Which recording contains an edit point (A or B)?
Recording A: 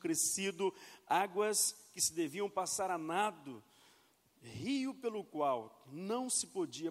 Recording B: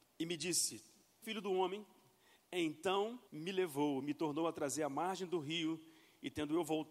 B